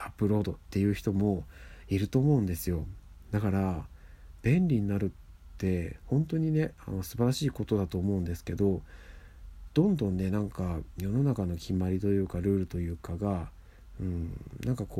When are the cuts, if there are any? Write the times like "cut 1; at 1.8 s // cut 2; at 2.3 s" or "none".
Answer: cut 1; at 11.0 s